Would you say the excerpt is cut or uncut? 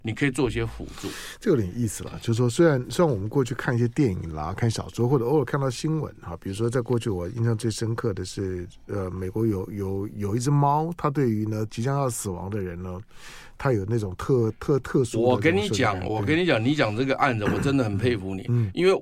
uncut